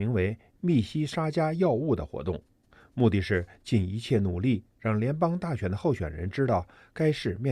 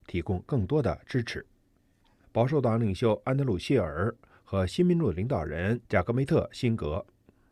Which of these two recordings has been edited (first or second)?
second